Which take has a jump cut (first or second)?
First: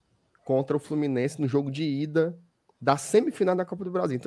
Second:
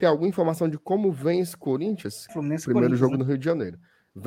second